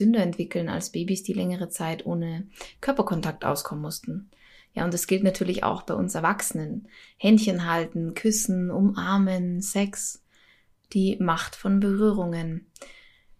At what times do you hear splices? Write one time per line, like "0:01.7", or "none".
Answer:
none